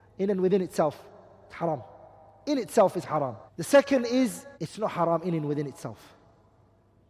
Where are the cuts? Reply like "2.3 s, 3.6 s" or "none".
3.5 s, 4.5 s